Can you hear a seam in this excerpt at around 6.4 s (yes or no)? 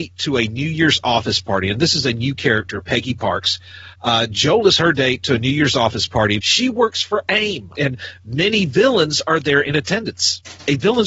yes